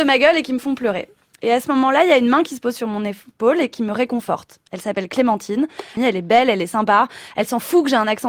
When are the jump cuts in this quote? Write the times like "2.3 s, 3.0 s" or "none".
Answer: 6.0 s